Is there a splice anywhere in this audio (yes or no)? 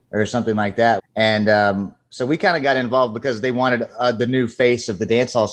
yes